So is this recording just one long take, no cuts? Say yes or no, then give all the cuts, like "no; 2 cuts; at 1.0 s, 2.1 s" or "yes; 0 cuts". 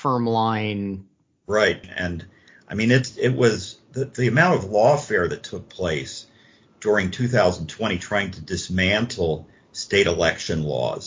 no; 1 cut; at 1.8 s